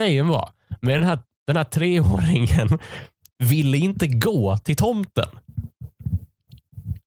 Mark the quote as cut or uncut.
uncut